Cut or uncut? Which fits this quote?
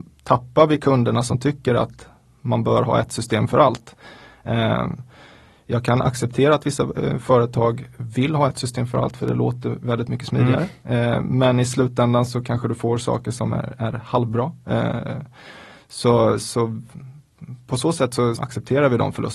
cut